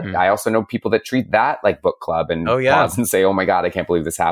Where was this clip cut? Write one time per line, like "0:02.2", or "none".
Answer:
none